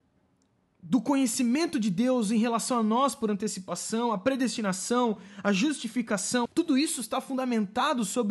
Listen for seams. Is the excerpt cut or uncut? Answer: cut